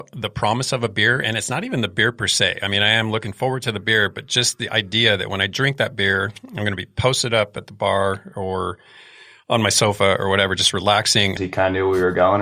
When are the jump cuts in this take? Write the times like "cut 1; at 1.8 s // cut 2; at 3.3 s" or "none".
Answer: cut 1; at 11.4 s